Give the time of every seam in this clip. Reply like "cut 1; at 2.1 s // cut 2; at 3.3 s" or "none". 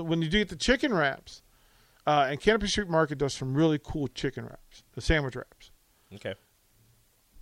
none